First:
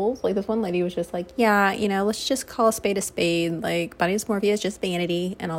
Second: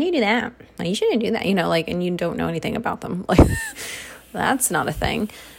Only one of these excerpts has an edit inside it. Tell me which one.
second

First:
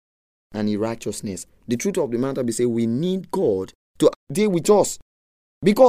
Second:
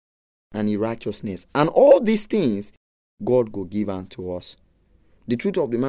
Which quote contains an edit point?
first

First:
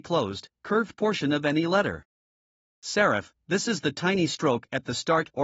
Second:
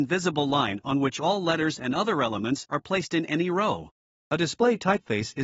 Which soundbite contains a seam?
second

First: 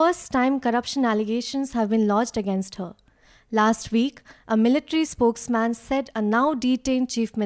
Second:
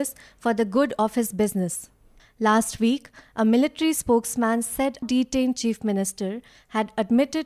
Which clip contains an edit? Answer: second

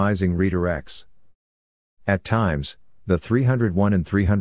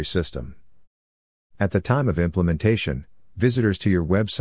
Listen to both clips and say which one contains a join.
second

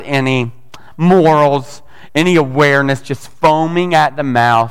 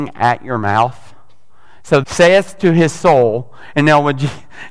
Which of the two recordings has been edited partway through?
second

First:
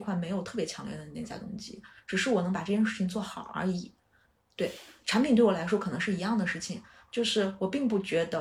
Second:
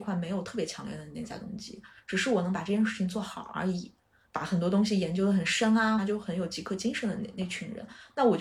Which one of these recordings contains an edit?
second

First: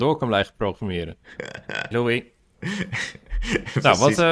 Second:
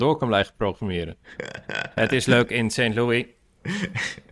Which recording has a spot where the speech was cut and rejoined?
first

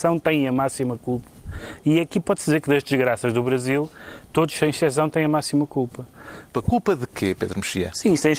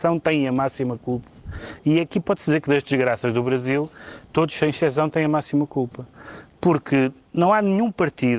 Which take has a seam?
first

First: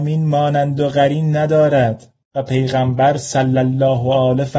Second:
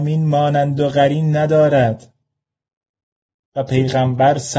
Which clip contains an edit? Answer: first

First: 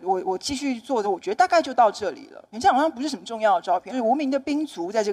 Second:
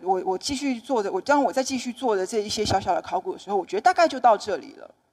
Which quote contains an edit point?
first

